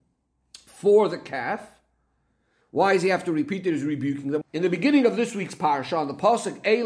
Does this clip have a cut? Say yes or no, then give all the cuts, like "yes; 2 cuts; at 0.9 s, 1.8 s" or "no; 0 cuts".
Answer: yes; 1 cut; at 4.4 s